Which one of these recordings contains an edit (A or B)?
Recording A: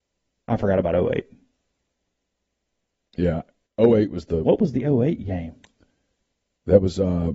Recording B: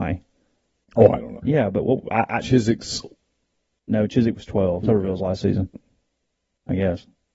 B